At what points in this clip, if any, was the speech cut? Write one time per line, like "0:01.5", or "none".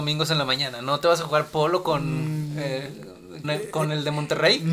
0:03.4